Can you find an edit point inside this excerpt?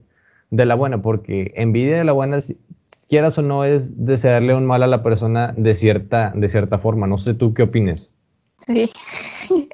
no; 0 cuts

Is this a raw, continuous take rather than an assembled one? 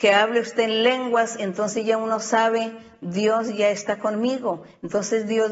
yes; 0 cuts

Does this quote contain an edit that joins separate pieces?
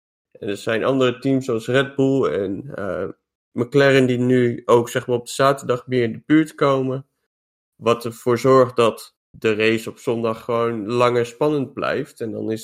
no; 0 cuts

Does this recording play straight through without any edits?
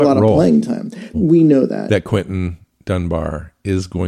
no; 1 cut; at 1.1 s

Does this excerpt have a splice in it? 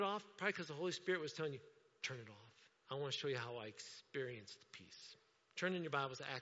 yes; 1 cut; at 2.8 s

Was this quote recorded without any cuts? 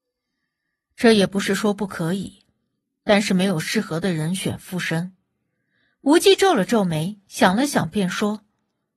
yes; 0 cuts

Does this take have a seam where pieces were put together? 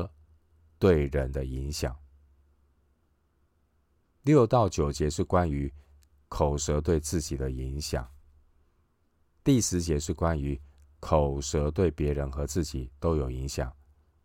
no; 0 cuts

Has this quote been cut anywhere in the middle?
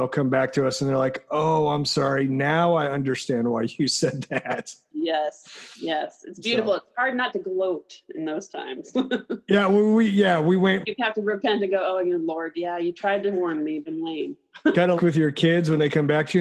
yes; 3 cuts; at 10.8 s, 13.9 s, 15.0 s

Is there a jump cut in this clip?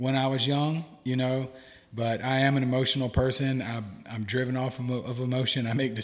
no; 0 cuts

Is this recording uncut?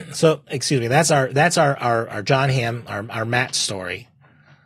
yes; 0 cuts

